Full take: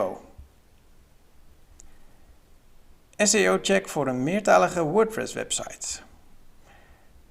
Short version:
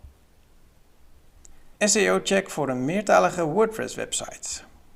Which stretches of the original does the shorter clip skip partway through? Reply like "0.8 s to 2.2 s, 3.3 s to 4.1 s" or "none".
2.1 s to 3.1 s